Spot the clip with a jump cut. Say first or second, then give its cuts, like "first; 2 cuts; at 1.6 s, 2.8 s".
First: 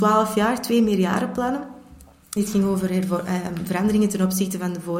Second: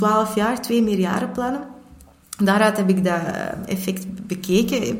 first; 1 cut; at 2.4 s